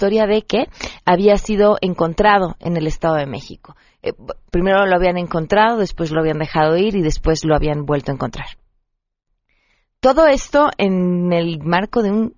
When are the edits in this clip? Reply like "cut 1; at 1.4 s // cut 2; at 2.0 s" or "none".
cut 1; at 4.5 s